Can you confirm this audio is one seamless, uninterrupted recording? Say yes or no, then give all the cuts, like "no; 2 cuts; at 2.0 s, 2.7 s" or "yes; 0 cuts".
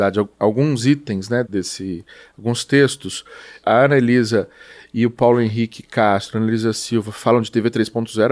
no; 2 cuts; at 1.5 s, 3.6 s